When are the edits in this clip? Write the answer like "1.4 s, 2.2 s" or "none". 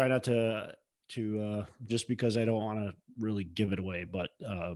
1.9 s